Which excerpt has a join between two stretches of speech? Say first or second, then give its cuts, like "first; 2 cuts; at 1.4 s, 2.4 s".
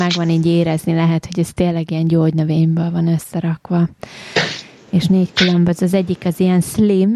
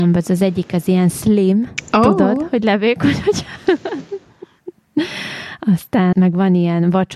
second; 1 cut; at 6.1 s